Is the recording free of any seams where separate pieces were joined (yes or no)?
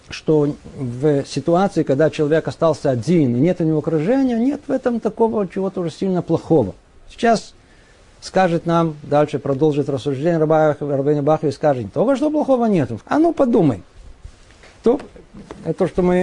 no